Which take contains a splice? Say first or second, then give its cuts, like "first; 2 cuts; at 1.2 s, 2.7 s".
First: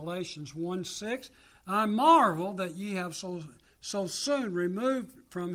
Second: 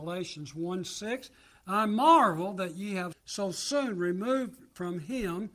second; 1 cut; at 3.1 s